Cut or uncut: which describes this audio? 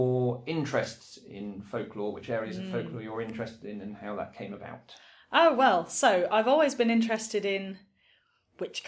uncut